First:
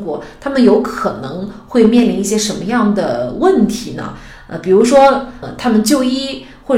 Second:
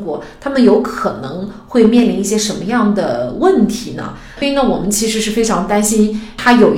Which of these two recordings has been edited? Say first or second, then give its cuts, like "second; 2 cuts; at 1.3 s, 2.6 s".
second; 1 cut; at 4.4 s